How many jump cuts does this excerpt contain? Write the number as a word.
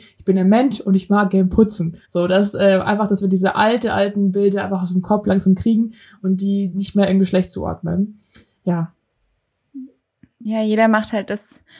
one